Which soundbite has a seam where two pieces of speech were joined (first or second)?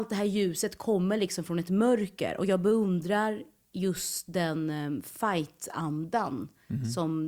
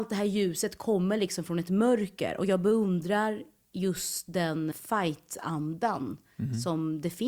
second